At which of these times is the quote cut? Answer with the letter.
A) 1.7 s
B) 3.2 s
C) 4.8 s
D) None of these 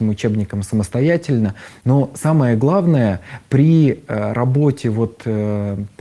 D